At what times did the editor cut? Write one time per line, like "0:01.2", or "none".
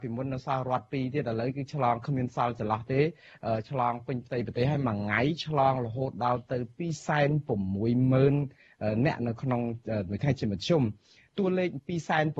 none